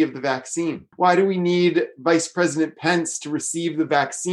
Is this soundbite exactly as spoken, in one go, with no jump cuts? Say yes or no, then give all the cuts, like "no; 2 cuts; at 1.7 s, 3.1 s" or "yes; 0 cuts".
no; 1 cut; at 0.9 s